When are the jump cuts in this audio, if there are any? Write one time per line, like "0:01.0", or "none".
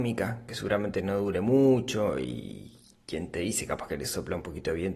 none